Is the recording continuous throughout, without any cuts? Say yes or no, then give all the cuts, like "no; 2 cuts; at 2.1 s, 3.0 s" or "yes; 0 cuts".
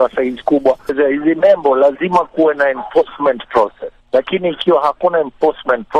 no; 1 cut; at 4.0 s